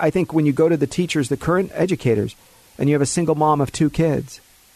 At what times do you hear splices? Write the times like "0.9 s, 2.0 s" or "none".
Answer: none